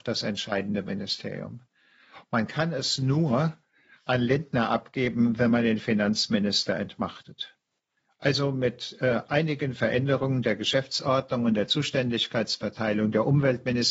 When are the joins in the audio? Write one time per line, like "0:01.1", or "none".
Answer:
none